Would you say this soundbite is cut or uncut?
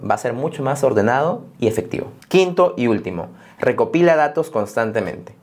cut